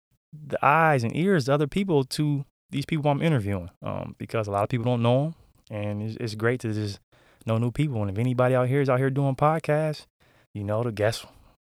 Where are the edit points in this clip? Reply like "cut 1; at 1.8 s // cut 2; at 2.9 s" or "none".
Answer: none